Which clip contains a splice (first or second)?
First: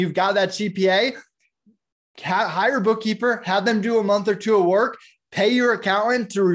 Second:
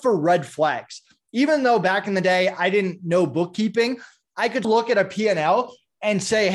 second